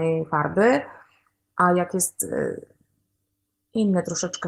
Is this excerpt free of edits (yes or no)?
yes